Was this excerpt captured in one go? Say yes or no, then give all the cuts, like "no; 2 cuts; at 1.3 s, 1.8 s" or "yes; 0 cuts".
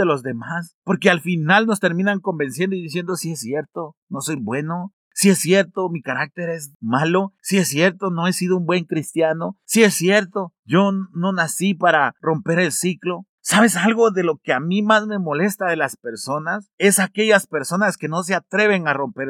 yes; 0 cuts